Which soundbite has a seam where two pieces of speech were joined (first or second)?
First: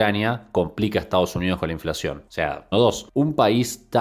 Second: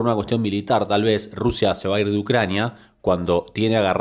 first